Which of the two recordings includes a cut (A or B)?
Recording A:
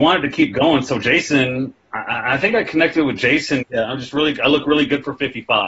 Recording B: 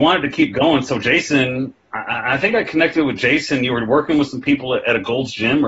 A